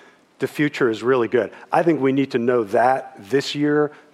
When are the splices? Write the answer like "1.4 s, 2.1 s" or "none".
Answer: none